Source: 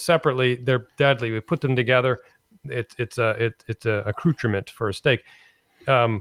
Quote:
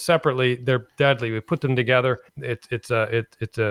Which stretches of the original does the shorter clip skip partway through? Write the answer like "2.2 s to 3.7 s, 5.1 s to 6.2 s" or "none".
2.3 s to 2.6 s